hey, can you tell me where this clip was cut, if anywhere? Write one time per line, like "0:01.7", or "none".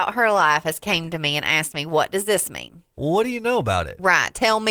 0:03.0